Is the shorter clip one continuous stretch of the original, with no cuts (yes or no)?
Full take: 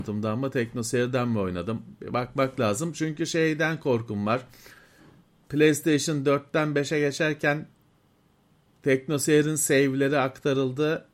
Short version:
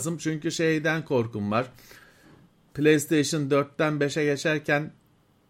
yes